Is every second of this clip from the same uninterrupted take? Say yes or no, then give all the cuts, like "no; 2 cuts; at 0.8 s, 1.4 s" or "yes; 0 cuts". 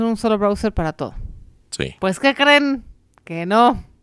yes; 0 cuts